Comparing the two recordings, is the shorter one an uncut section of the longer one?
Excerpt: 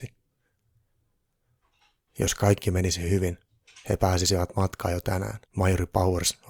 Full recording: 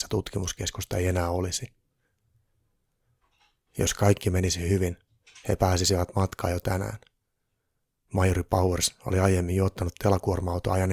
no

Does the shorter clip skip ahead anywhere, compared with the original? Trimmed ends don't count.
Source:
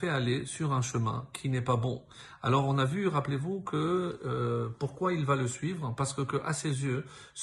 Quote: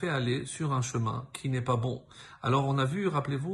no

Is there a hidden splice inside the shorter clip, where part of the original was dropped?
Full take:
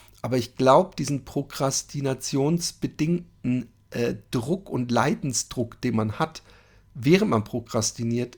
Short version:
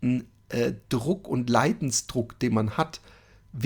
no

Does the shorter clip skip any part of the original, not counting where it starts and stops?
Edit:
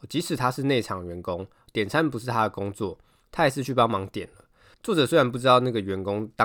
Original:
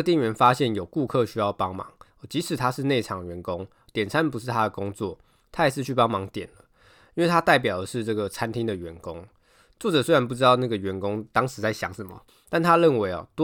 yes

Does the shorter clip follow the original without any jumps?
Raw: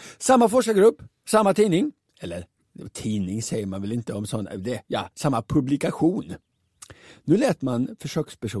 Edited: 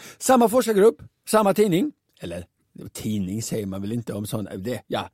yes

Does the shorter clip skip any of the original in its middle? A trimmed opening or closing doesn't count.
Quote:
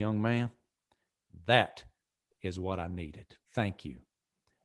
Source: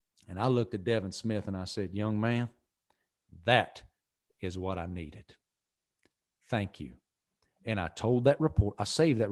yes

